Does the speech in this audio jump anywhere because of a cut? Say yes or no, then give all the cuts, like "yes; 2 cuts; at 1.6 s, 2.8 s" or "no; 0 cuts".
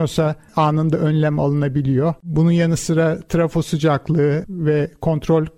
no; 0 cuts